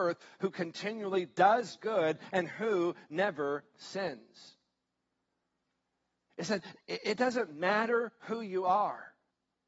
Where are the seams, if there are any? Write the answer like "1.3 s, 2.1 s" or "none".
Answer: 6.3 s

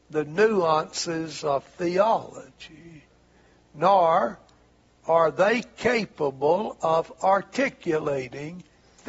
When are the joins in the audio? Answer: none

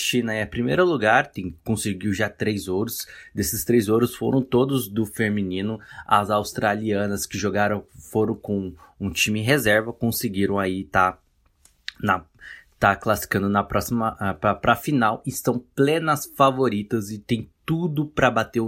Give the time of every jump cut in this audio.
6.0 s

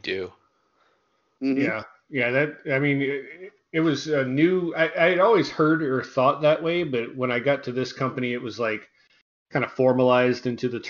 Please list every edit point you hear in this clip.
none

